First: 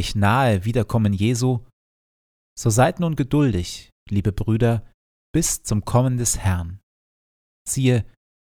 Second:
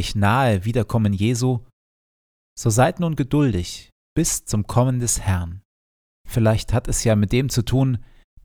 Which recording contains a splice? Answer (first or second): second